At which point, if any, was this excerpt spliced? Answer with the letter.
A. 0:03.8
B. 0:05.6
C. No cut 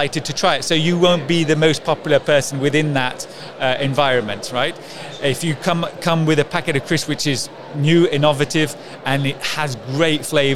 C